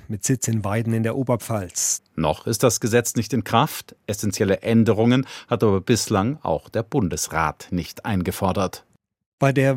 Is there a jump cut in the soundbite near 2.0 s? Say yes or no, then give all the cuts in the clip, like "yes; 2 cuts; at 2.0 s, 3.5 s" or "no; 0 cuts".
yes; 1 cut; at 2.0 s